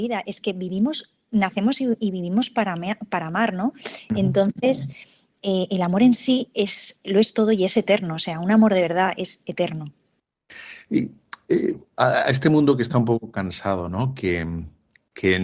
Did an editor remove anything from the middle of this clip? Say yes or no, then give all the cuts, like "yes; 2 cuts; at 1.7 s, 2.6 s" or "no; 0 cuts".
no; 0 cuts